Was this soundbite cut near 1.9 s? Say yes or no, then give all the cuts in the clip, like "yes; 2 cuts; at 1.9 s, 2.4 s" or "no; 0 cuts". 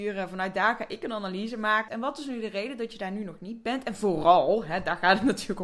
yes; 1 cut; at 1.9 s